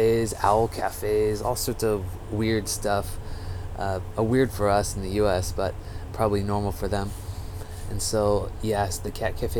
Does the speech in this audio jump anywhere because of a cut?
no; 0 cuts

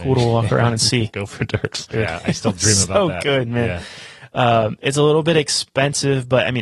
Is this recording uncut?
no; 1 cut; at 1.9 s

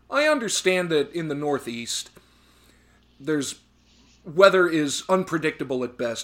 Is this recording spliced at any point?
no; 0 cuts

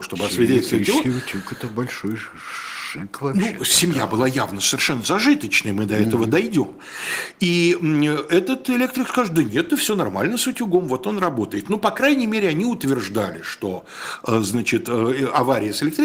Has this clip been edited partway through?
no; 0 cuts

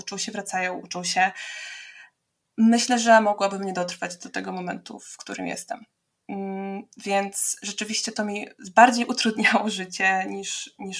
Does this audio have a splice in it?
no; 0 cuts

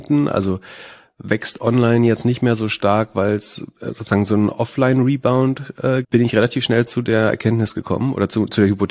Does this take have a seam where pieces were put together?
yes; 1 cut; at 6.0 s

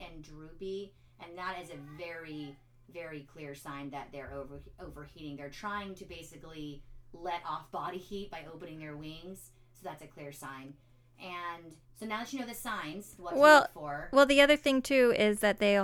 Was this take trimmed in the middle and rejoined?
yes; 1 cut; at 11.8 s

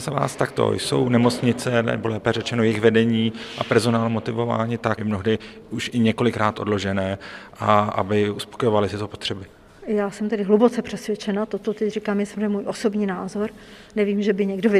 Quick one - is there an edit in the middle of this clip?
yes; 1 cut; at 5.0 s

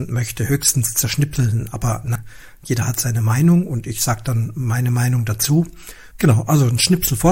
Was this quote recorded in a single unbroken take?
no; 2 cuts; at 2.2 s, 6.1 s

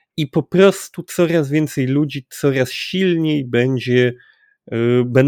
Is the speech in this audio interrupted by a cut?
no; 0 cuts

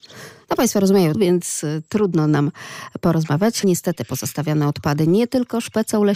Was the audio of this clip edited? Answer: yes; 2 cuts; at 1.1 s, 3.6 s

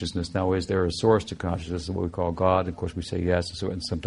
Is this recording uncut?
yes; 0 cuts

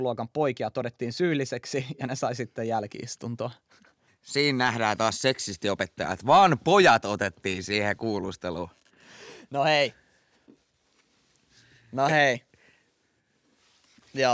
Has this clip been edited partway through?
yes; 1 cut; at 4.1 s

